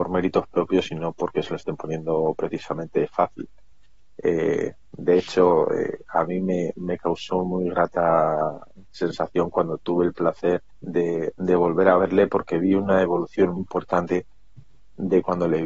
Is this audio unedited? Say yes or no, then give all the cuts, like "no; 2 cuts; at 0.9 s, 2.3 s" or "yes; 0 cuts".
no; 2 cuts; at 10.7 s, 13.6 s